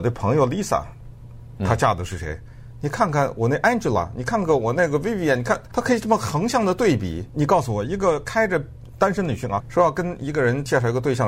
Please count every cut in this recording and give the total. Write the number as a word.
two